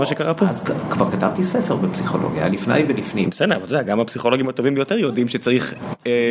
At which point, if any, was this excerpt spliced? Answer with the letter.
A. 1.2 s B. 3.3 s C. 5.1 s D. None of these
D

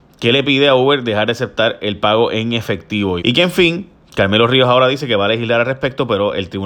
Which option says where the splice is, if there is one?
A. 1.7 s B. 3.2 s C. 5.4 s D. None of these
B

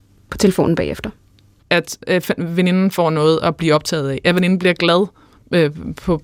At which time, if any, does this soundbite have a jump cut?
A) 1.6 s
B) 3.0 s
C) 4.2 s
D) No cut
A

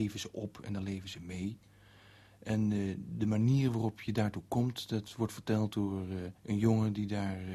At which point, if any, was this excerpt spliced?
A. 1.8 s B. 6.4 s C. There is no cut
B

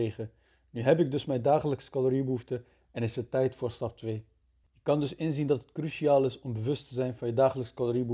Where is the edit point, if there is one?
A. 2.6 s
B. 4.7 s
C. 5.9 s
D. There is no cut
B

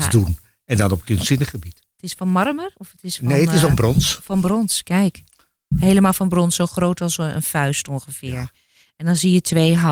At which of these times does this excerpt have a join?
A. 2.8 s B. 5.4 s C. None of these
C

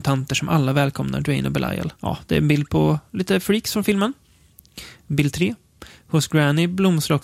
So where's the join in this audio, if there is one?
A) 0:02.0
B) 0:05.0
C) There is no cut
A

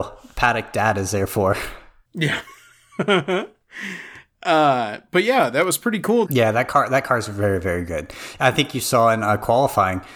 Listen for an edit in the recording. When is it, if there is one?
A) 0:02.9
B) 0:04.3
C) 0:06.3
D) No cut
C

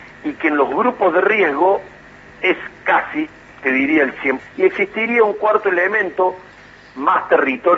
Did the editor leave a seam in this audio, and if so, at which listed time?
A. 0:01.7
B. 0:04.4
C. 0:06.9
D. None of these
B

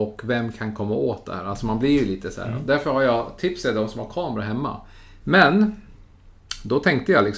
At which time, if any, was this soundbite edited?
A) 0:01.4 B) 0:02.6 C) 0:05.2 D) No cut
C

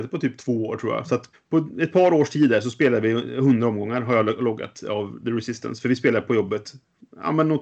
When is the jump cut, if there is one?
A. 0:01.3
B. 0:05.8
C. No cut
A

